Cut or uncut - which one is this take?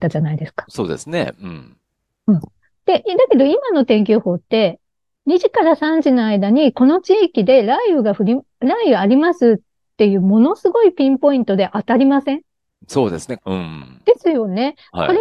cut